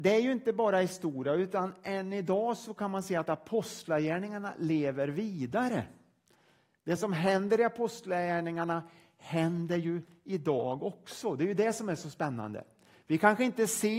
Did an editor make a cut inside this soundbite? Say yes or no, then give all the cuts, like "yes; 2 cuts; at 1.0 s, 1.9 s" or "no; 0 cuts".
no; 0 cuts